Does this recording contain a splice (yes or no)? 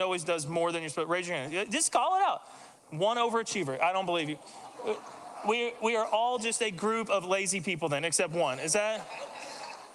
no